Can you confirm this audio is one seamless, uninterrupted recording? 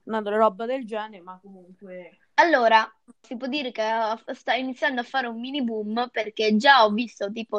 no; 1 cut; at 3.2 s

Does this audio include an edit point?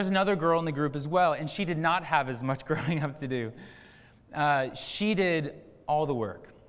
no; 0 cuts

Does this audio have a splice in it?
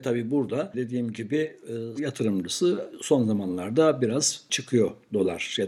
yes; 1 cut; at 2.0 s

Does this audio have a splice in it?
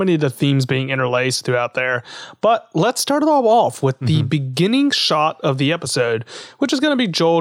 no; 0 cuts

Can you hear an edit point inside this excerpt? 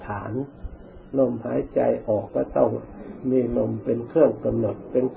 yes; 1 cut; at 2.3 s

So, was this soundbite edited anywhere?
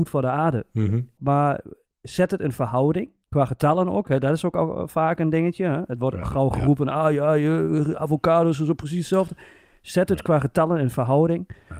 yes; 1 cut; at 1.2 s

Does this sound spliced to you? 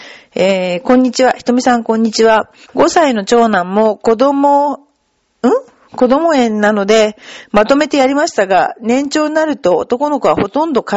yes; 1 cut; at 2.6 s

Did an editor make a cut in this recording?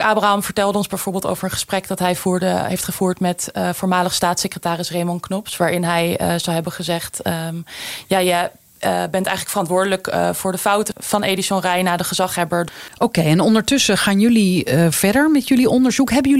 yes; 2 cuts; at 10.9 s, 12.9 s

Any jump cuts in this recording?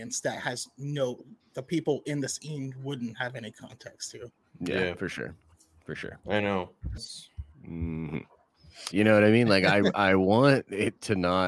yes; 2 cuts; at 7.0 s, 8.9 s

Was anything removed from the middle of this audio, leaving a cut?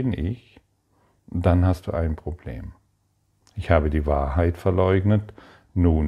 yes; 1 cut; at 3.4 s

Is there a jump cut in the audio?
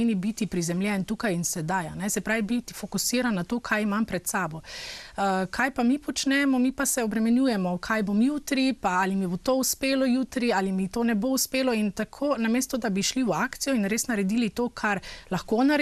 no; 0 cuts

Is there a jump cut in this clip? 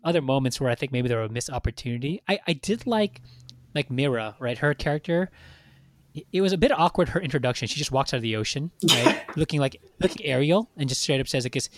yes; 2 cuts; at 8.7 s, 10.2 s

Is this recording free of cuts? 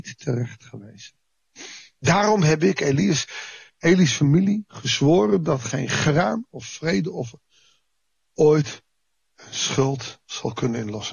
yes; 0 cuts

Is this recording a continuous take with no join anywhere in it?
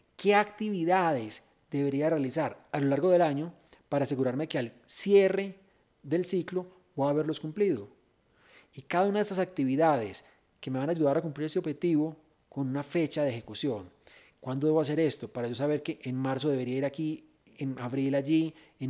yes; 0 cuts

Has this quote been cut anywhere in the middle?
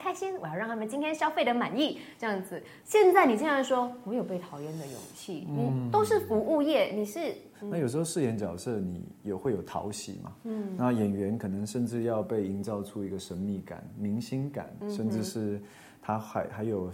yes; 1 cut; at 7.5 s

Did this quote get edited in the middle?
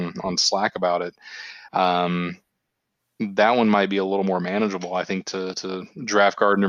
yes; 1 cut; at 1.7 s

